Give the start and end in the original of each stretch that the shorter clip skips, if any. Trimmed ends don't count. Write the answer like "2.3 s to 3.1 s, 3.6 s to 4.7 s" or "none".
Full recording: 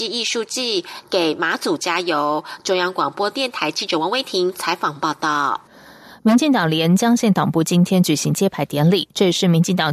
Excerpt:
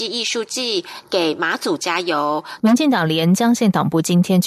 2.6 s to 6.2 s